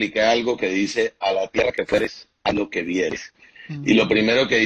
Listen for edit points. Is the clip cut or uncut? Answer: uncut